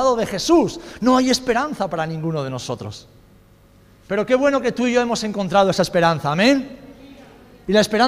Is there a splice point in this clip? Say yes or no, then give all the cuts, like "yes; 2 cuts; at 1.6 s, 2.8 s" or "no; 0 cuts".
no; 0 cuts